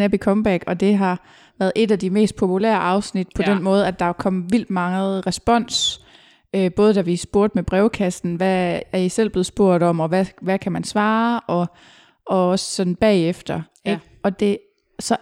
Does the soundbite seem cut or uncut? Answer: uncut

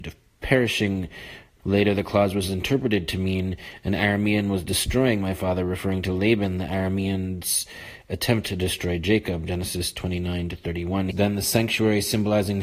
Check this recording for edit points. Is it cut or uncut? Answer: cut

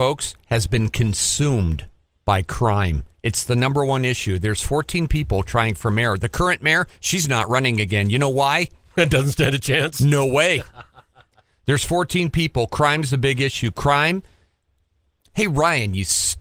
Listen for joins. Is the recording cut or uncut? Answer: uncut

